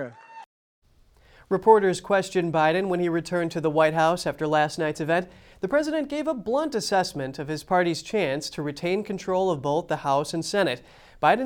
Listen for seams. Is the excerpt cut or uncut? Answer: uncut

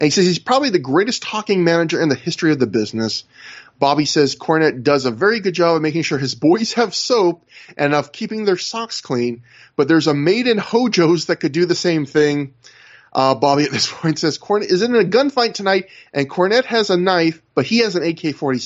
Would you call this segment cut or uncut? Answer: uncut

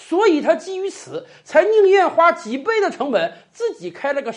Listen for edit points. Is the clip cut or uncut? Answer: uncut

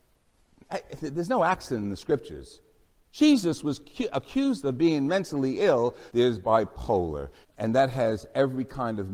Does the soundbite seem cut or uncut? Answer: cut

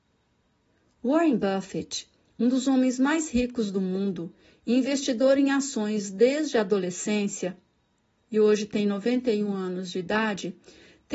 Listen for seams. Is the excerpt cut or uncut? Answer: uncut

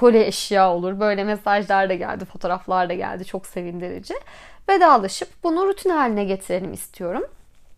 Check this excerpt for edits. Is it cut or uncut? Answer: uncut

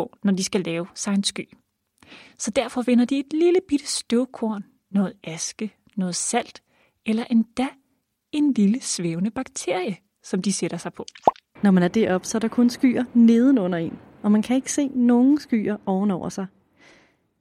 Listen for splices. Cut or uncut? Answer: cut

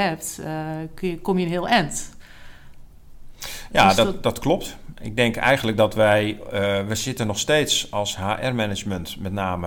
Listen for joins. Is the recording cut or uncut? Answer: uncut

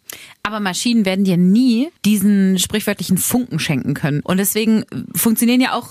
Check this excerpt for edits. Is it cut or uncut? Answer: cut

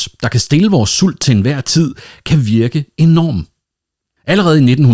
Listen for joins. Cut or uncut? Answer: uncut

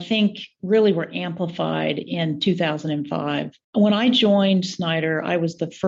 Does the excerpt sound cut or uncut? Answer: cut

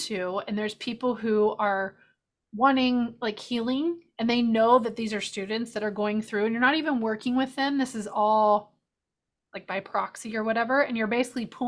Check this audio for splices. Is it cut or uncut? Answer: uncut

